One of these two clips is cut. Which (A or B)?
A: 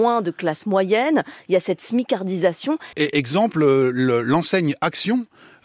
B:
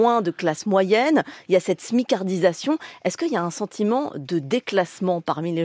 A